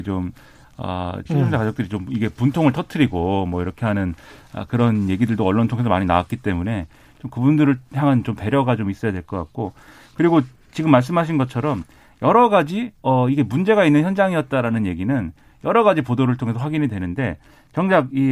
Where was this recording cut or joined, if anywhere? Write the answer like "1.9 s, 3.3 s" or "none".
1.3 s